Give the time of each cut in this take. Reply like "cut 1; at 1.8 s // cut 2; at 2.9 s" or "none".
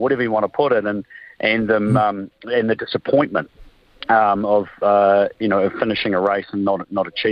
none